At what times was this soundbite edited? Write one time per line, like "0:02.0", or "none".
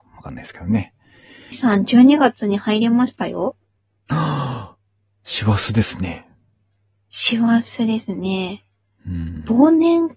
0:01.5